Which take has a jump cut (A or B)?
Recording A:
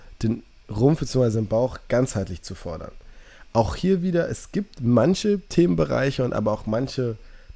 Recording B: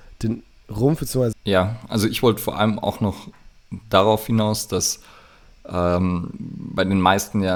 B